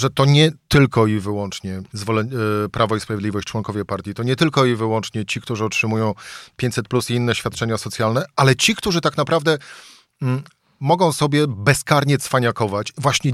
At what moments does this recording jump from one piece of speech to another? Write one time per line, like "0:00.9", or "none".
0:01.9